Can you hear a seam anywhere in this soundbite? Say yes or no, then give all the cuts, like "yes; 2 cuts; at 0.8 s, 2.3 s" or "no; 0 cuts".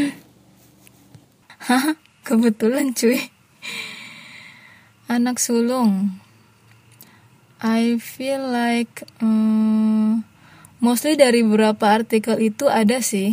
no; 0 cuts